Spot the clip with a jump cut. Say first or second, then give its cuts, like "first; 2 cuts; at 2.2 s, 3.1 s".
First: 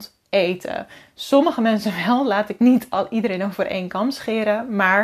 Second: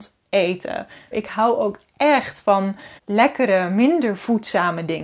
second; 2 cuts; at 1.1 s, 3.0 s